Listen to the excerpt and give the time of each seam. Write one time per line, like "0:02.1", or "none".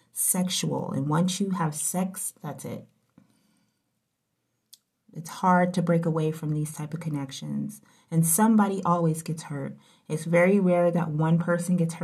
none